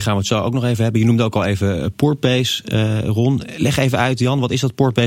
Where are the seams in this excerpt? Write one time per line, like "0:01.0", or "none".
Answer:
none

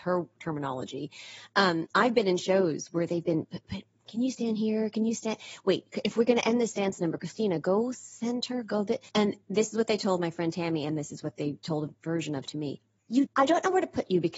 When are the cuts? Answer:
0:09.1
0:13.3

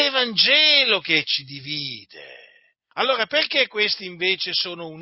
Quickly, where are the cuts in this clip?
0:02.9

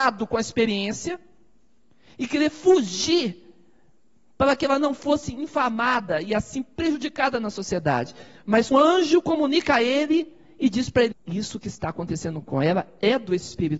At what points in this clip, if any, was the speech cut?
0:08.7
0:11.1

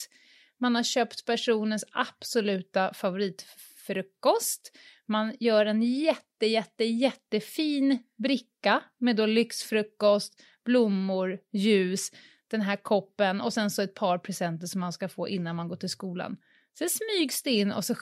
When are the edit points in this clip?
none

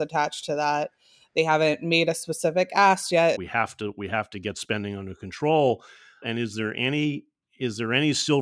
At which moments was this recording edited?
0:03.3
0:06.2

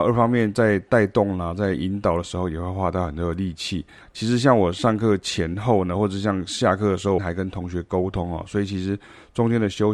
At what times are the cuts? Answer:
0:04.0
0:07.2

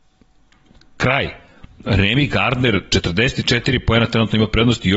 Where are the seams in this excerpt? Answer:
none

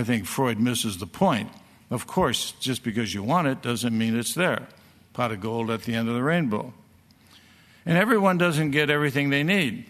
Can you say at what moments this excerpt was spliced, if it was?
none

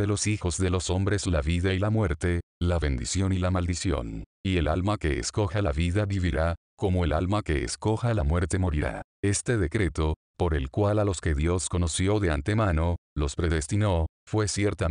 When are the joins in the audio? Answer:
none

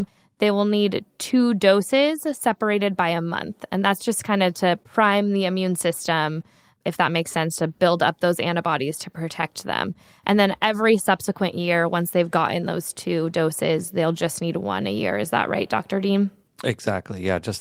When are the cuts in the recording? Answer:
none

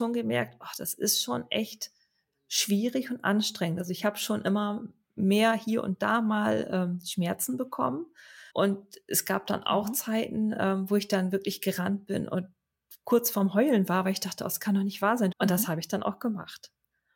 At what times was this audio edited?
0:08.5
0:15.3

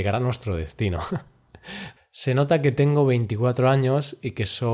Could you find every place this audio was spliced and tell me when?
0:02.0

